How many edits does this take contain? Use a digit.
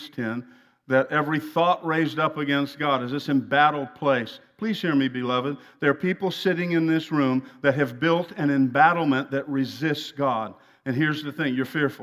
0